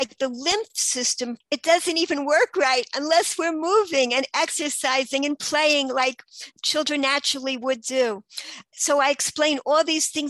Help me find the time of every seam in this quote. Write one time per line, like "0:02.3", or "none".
0:01.4
0:06.6